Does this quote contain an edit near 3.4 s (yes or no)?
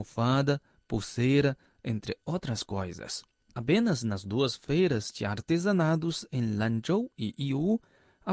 yes